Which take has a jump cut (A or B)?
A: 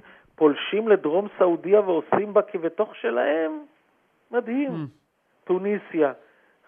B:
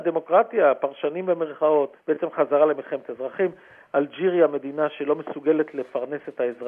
B